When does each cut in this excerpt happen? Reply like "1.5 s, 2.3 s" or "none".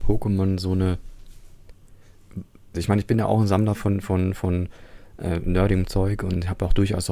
2.7 s